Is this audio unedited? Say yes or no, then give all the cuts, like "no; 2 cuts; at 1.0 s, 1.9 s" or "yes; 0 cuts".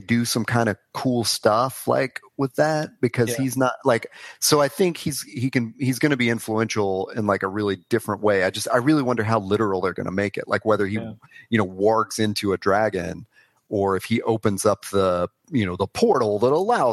yes; 0 cuts